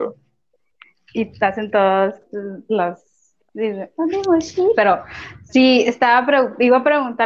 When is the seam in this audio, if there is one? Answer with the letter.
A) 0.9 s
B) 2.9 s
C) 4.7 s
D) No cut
C